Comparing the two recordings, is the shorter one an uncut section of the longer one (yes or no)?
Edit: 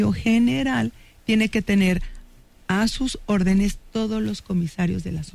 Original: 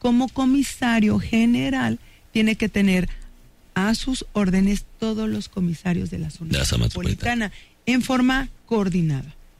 yes